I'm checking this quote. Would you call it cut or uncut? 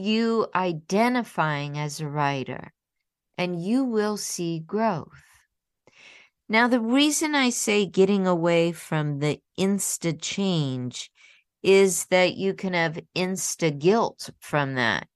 uncut